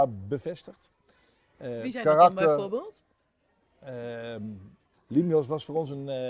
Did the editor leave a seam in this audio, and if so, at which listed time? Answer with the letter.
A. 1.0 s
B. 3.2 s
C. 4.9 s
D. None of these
C